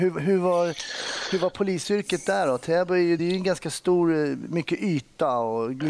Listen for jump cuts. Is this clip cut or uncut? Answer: uncut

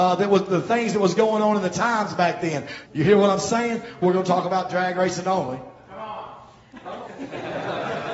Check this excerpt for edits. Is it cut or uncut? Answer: cut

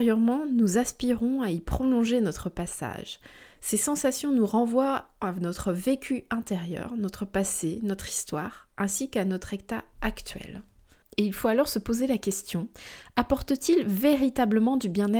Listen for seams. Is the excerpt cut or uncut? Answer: cut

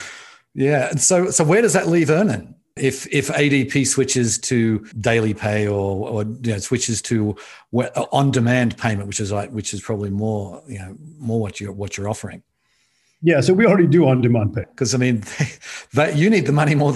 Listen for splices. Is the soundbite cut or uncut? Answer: cut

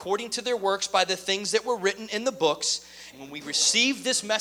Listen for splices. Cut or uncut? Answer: cut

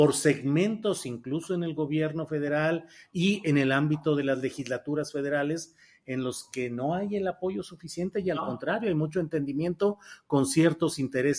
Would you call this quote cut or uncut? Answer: uncut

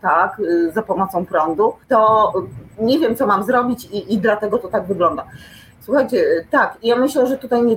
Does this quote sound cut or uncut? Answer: cut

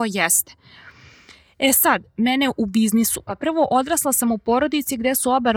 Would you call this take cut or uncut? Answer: cut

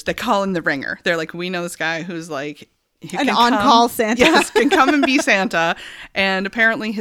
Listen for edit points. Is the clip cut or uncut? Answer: uncut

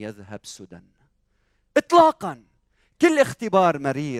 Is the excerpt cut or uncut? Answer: uncut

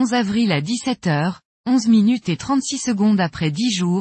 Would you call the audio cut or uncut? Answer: uncut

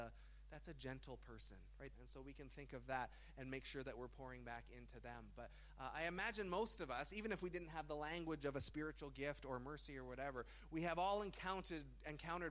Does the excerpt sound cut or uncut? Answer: cut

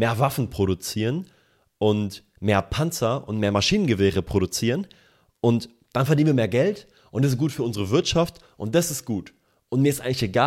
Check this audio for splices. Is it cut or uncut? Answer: uncut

